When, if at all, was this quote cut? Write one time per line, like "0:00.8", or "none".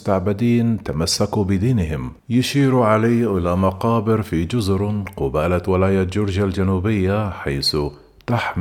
0:02.2